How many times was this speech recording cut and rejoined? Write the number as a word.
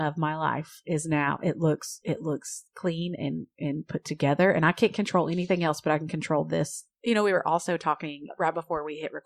zero